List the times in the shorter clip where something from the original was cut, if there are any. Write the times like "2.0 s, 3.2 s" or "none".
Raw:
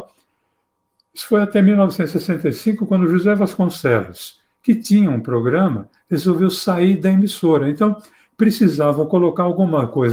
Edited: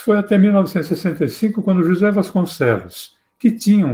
none

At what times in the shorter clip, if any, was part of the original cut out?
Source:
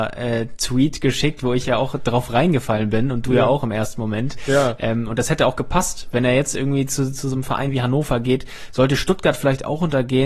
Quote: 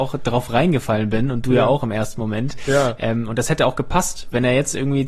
none

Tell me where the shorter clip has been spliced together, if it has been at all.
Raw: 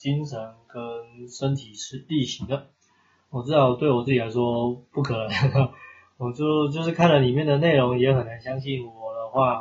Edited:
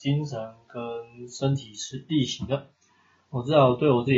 none

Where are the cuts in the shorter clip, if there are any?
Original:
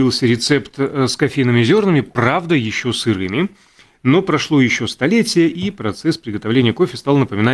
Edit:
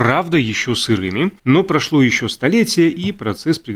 1.4 s

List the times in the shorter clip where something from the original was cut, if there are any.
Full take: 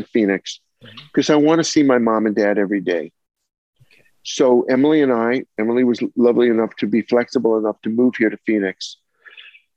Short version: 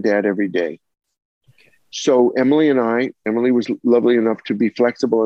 none

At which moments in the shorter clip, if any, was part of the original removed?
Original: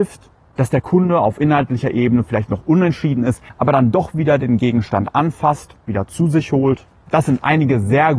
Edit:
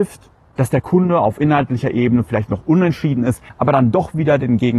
none

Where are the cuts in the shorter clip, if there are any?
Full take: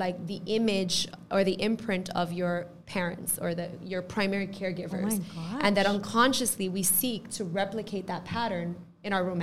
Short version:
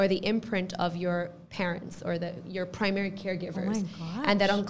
none

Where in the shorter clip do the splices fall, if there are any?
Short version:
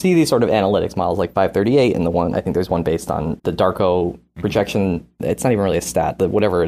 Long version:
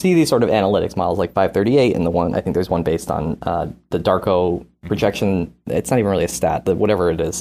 3.4 s

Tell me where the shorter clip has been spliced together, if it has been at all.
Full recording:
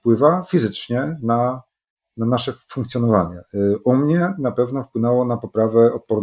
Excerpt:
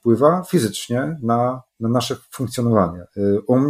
1.7 s

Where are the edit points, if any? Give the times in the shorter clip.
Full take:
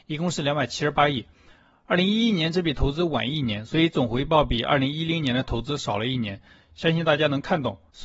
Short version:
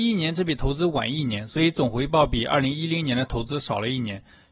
none

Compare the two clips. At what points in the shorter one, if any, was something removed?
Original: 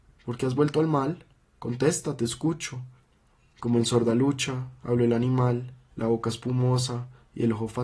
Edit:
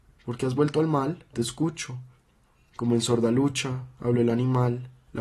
1.3 s

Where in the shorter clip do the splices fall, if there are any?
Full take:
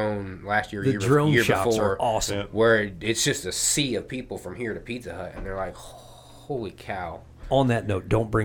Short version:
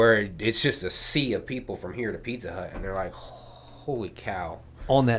none

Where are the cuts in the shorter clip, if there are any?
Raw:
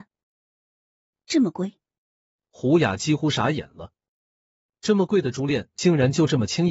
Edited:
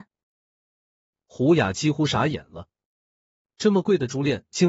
1.2 s

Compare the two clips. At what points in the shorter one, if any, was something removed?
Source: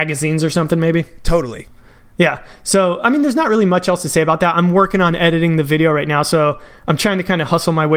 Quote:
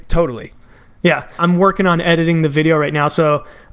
1.4 s

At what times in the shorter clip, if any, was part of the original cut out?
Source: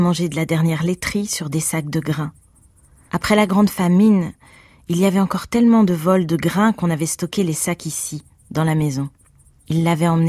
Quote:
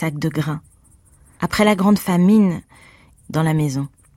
3.1 s

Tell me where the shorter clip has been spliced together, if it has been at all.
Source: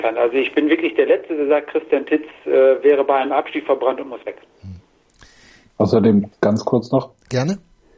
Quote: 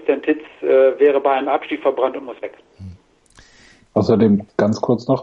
none

